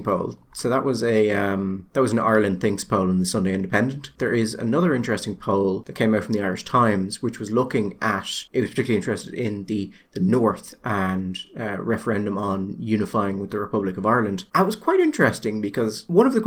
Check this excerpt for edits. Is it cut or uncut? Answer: uncut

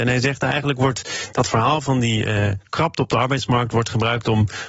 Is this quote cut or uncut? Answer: uncut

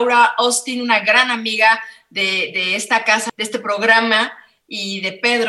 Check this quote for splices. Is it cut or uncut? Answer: cut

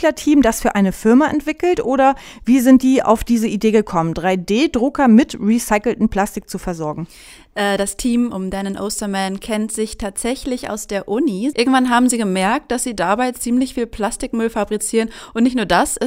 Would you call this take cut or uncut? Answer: cut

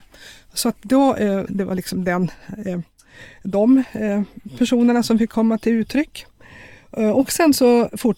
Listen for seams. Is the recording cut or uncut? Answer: cut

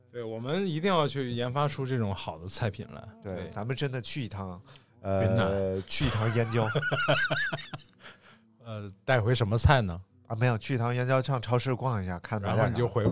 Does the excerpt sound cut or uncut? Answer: uncut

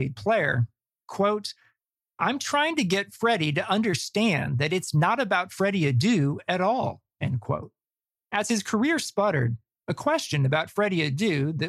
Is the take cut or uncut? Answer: cut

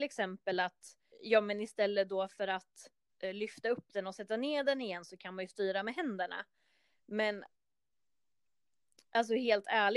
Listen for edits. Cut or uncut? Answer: cut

